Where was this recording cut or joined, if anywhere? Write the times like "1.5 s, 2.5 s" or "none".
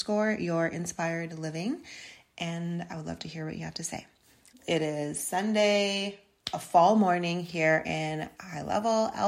4.5 s